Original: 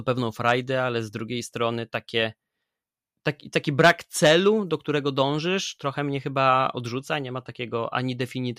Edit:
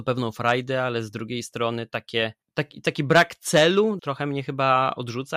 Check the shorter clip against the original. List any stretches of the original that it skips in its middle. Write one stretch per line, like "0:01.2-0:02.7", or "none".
0:02.4-0:03.1
0:04.7-0:05.8